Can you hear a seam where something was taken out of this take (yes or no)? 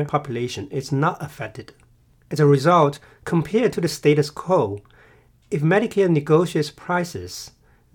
no